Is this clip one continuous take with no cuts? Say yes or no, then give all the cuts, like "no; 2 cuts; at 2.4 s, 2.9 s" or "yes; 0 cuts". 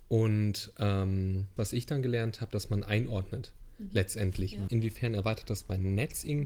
no; 2 cuts; at 1.6 s, 4.7 s